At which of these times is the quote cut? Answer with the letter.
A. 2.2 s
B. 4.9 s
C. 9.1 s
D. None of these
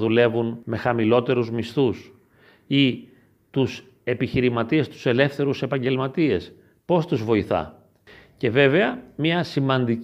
D